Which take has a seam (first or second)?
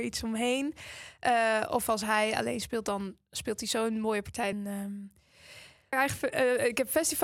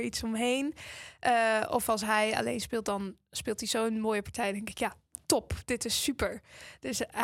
first